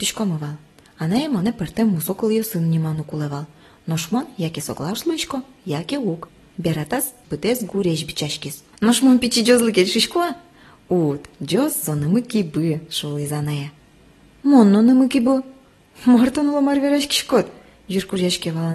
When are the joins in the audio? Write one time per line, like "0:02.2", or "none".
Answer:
0:07.2